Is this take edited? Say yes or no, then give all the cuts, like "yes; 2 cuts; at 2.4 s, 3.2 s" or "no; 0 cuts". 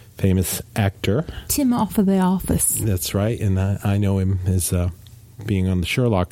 no; 0 cuts